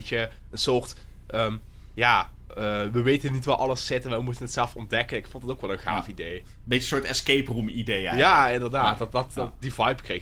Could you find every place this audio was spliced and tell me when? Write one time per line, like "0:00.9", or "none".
none